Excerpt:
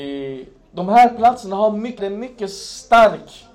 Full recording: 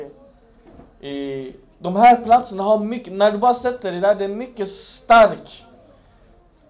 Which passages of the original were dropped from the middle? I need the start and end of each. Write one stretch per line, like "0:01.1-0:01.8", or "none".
0:03.1-0:04.2